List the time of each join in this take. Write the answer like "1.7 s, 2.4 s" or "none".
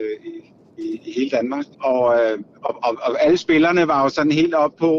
1.7 s